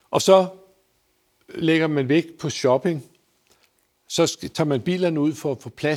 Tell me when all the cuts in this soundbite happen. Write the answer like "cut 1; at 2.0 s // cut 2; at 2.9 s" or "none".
none